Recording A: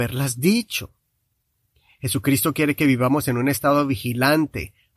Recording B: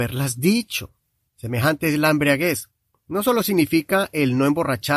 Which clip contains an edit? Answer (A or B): B